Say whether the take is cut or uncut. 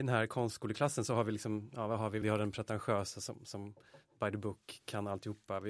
cut